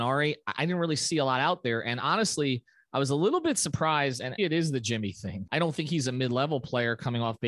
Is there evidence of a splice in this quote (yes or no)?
yes